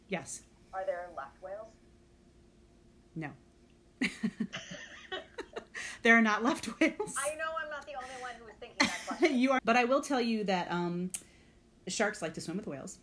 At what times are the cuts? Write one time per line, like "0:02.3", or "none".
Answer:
0:09.6